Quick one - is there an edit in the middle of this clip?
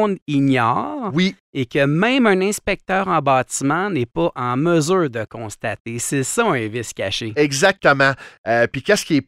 no; 0 cuts

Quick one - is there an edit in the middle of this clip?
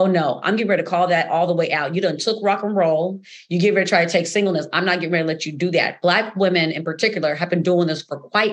no; 0 cuts

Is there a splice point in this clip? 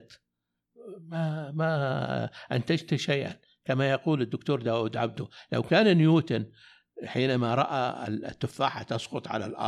no; 0 cuts

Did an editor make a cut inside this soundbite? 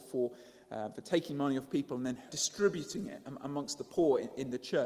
yes; 1 cut; at 2.3 s

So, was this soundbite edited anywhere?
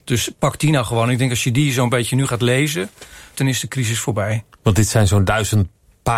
yes; 1 cut; at 3.3 s

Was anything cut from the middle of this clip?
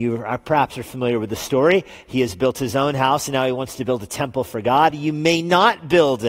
yes; 1 cut; at 4.9 s

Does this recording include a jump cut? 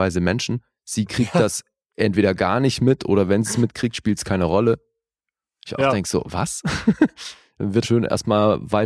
yes; 2 cuts; at 6.2 s, 7.8 s

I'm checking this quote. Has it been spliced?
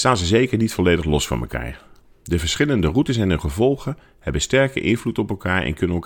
no; 0 cuts

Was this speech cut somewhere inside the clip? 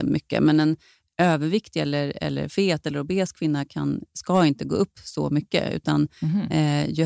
no; 0 cuts

